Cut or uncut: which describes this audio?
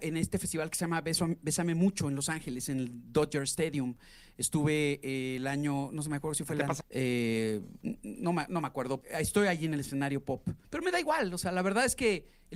cut